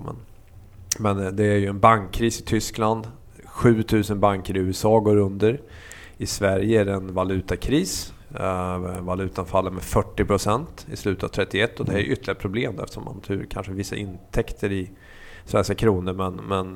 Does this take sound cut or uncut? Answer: uncut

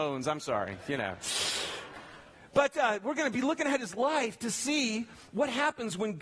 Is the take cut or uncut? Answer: uncut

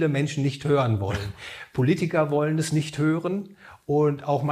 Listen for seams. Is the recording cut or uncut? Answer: uncut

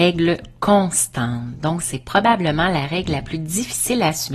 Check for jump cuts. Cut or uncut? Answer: uncut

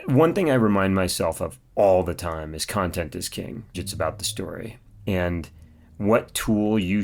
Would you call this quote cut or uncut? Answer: cut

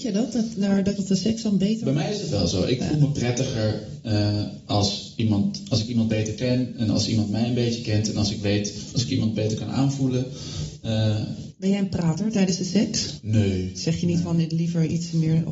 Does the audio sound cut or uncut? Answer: cut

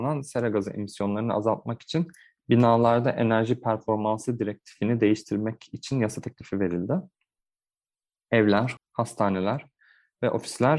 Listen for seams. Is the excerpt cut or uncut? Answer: cut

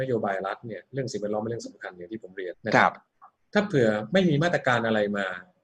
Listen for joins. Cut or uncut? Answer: cut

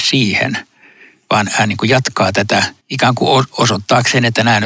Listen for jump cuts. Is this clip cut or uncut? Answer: cut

